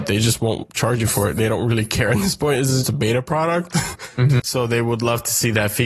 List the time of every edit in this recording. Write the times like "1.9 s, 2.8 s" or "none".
2.8 s, 4.4 s